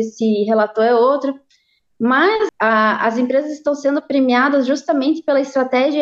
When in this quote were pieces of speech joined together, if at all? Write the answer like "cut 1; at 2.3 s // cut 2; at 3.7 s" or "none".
cut 1; at 2.5 s